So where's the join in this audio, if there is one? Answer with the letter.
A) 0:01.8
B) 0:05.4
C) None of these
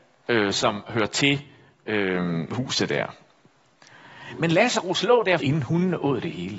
B